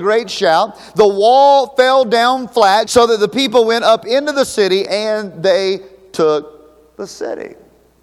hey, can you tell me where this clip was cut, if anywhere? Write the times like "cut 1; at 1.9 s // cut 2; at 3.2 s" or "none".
cut 1; at 2.8 s // cut 2; at 4.9 s